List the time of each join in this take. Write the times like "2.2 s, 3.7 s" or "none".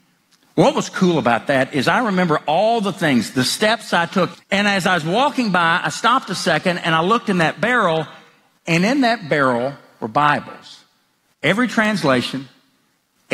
4.3 s